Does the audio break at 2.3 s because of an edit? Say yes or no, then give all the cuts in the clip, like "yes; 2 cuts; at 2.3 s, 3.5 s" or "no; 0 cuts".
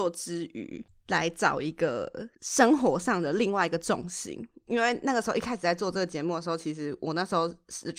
yes; 1 cut; at 2.3 s